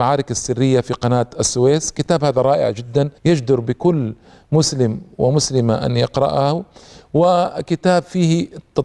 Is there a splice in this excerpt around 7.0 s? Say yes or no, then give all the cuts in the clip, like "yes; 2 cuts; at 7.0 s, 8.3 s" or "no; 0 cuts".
no; 1 cut; at 3.2 s